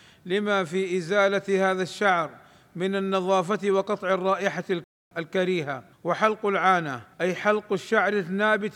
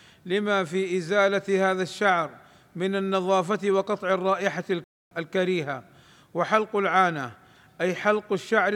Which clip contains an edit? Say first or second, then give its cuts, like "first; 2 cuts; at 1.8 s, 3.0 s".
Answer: first; 2 cuts; at 5.9 s, 7.1 s